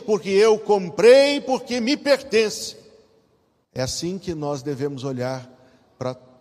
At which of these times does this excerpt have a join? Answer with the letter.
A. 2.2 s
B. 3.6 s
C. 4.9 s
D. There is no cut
B